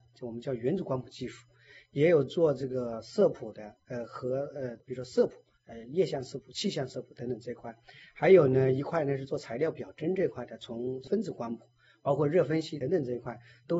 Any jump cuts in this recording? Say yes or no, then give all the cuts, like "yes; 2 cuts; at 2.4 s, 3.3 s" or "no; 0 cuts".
yes; 1 cut; at 12.8 s